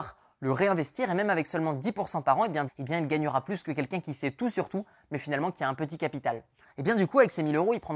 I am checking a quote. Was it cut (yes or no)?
yes